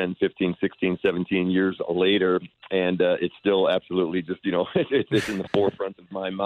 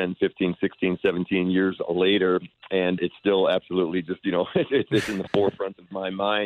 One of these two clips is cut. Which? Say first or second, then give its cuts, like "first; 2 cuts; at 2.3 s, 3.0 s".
second; 1 cut; at 3.0 s